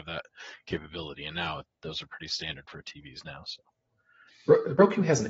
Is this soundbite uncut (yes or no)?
yes